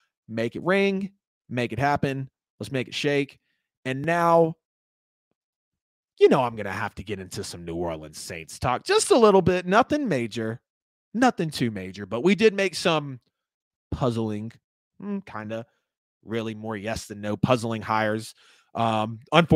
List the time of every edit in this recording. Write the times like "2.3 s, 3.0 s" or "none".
none

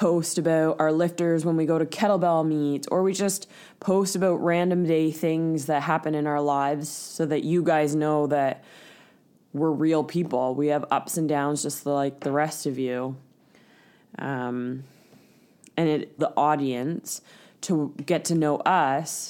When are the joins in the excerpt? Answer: 16.2 s

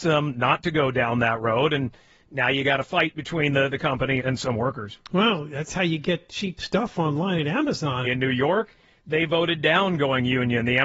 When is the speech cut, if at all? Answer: 4.2 s, 8.0 s

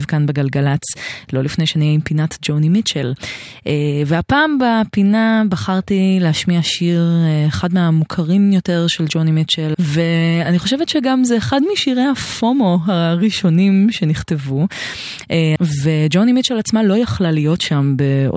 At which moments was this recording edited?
9.7 s, 15.6 s

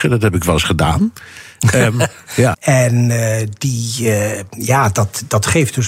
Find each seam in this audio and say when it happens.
2.5 s

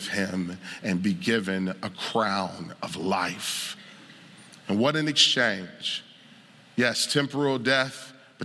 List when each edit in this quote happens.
none

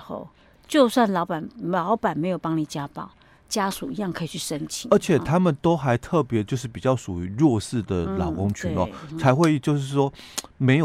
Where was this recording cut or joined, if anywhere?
none

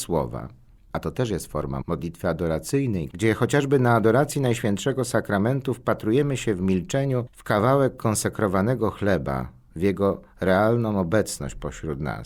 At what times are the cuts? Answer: 1.8 s, 3.1 s, 9.7 s

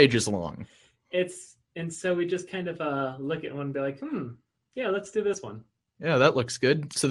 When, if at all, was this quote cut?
none

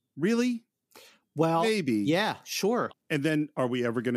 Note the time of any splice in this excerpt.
2.9 s

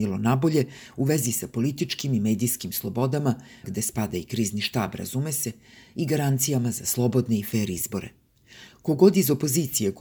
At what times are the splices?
3.6 s

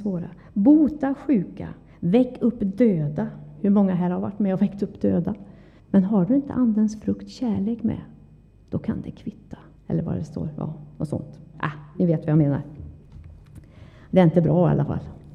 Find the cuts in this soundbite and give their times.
5.8 s, 9.8 s, 11.5 s

